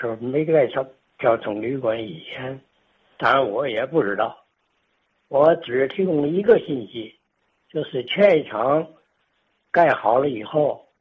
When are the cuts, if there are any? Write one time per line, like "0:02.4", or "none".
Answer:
none